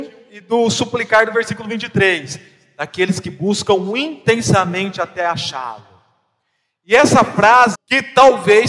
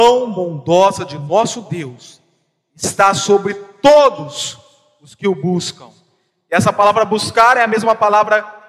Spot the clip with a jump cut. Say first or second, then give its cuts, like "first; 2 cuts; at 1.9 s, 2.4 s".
first; 1 cut; at 7.7 s